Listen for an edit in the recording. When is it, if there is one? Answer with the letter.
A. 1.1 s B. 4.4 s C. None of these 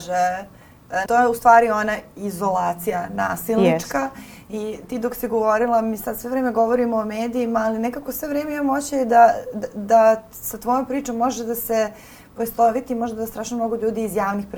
A